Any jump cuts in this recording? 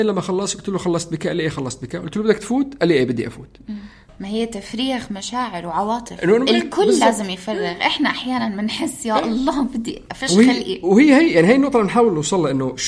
no; 0 cuts

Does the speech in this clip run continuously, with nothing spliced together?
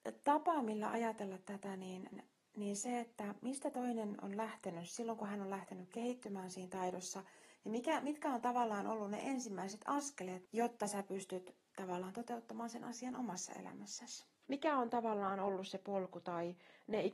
no; 2 cuts; at 10.5 s, 14.5 s

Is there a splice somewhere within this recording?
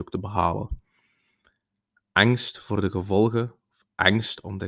no; 0 cuts

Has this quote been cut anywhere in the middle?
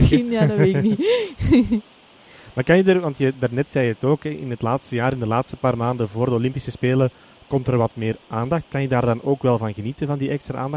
no; 0 cuts

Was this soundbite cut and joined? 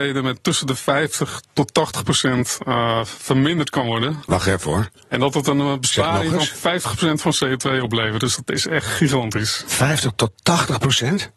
no; 0 cuts

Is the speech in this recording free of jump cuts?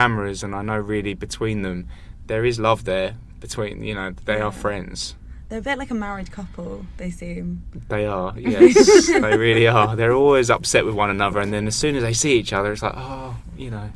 yes; 0 cuts

